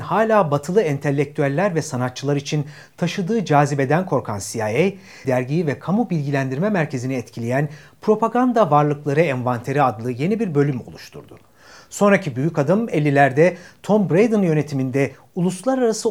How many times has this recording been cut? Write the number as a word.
one